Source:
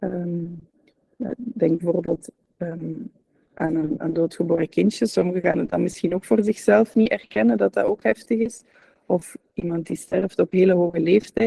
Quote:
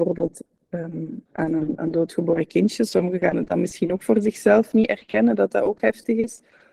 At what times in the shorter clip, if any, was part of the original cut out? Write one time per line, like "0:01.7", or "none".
0:01.3